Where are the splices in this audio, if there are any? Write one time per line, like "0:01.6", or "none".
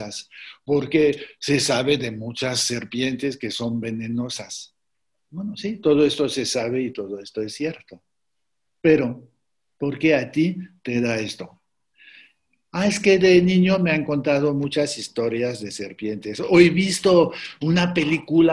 none